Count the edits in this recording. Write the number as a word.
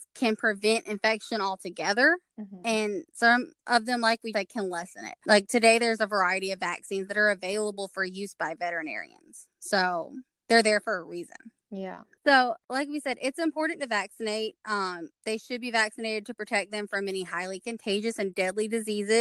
one